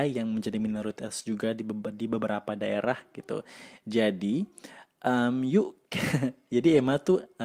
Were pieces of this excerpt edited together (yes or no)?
no